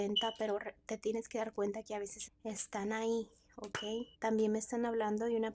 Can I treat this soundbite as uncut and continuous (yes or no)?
no